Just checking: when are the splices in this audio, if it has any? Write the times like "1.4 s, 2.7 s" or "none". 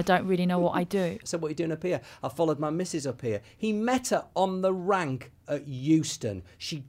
1.2 s